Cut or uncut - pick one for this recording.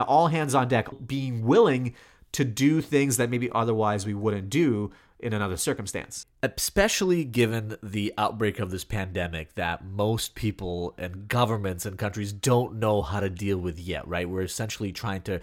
cut